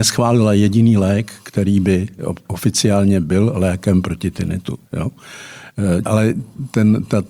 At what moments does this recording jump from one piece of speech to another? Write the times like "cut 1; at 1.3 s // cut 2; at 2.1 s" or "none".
cut 1; at 4.9 s // cut 2; at 6.1 s